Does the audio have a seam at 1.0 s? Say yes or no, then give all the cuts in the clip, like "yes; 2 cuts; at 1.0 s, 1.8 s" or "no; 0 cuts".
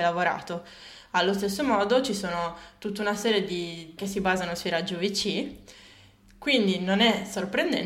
no; 1 cut; at 4.0 s